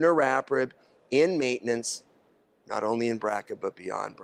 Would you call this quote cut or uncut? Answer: uncut